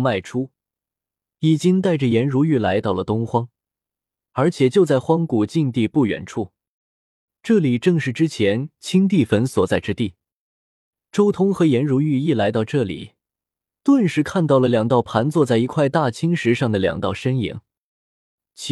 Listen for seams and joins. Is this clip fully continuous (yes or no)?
yes